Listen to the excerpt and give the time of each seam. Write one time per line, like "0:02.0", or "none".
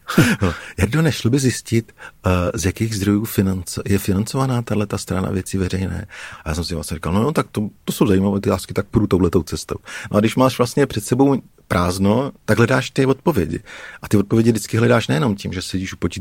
0:12.5